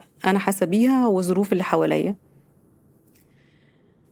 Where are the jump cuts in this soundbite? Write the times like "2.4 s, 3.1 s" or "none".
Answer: none